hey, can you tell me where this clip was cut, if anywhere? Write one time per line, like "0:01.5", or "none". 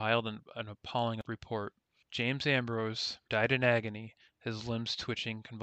0:03.3